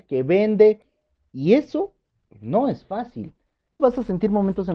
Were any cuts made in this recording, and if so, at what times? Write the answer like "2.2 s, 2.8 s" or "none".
3.8 s